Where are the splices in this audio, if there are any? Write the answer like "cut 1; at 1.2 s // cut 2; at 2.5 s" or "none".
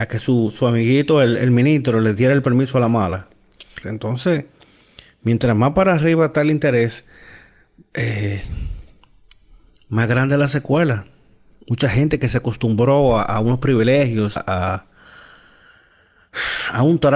cut 1; at 3.8 s // cut 2; at 14.4 s